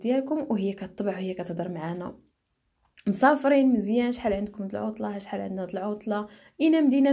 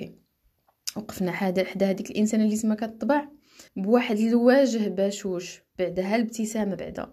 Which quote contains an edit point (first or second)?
second